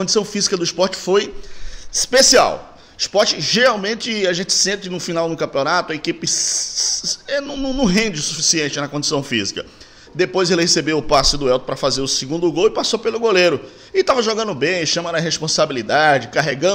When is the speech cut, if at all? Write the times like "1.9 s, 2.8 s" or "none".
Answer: 10.1 s